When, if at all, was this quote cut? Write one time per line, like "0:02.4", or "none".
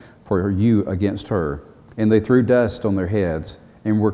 0:01.9

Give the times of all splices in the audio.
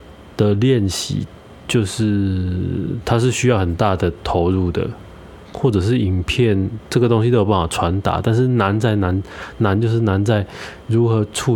0:05.5

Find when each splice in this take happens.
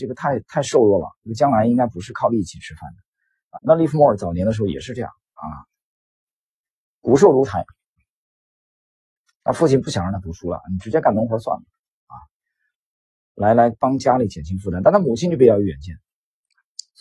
0:03.5

